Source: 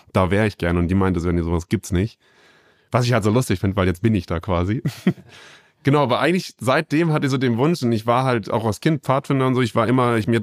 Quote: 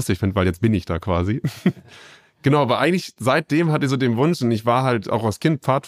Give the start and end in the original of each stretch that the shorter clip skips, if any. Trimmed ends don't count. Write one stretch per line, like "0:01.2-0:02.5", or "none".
none